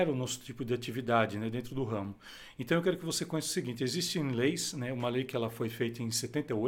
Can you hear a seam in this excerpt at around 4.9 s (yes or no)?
no